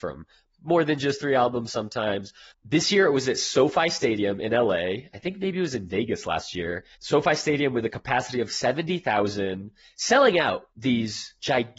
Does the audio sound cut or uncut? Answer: cut